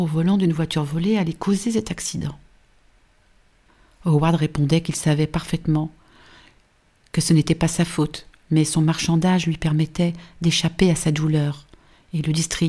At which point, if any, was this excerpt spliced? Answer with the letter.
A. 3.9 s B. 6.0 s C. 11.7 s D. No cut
D